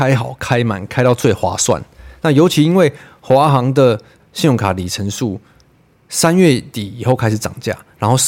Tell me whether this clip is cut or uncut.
uncut